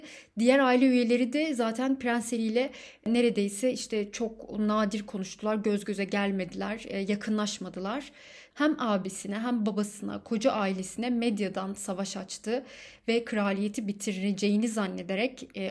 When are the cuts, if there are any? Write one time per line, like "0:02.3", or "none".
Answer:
0:08.5

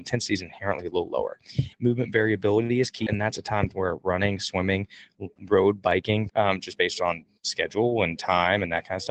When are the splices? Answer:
0:01.7
0:03.1
0:06.3

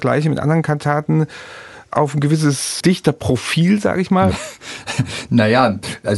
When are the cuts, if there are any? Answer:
none

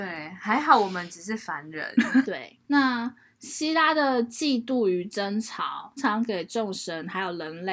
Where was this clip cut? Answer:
0:02.2
0:06.0

